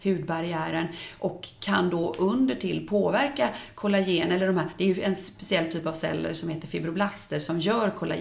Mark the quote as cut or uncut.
uncut